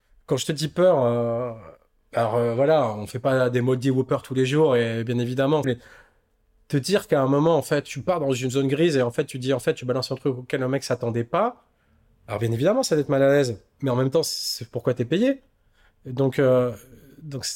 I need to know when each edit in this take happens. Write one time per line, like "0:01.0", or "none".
0:05.6